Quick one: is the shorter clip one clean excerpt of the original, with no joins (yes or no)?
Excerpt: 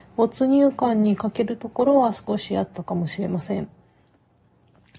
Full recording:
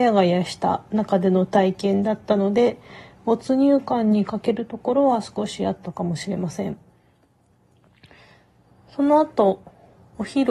yes